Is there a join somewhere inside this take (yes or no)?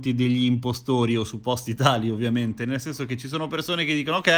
no